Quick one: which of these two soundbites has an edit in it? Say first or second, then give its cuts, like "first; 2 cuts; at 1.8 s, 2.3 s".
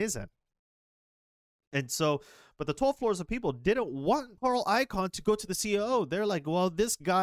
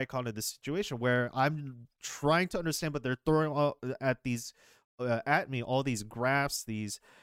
first; 1 cut; at 4.4 s